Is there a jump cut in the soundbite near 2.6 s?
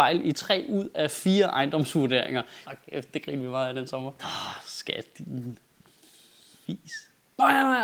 yes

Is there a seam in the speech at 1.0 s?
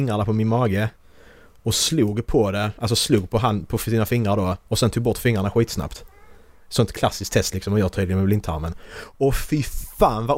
no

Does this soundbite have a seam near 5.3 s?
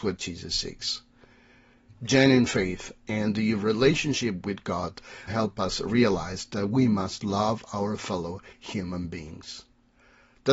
yes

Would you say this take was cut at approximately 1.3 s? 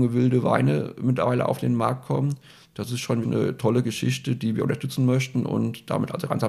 no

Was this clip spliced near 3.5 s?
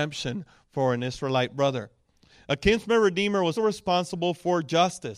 yes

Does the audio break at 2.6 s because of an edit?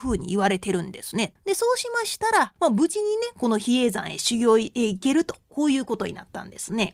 yes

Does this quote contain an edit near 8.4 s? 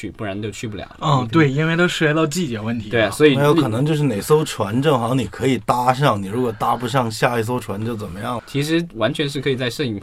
yes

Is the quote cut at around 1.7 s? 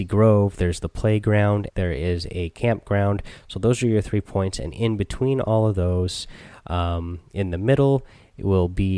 yes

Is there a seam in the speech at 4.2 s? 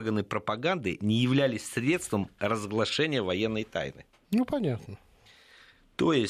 no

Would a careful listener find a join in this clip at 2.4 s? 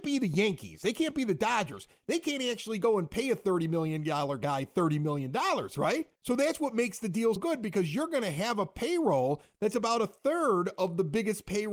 no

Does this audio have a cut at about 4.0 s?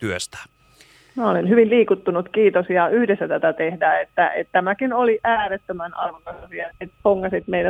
no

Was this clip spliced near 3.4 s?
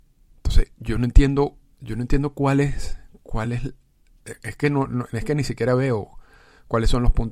no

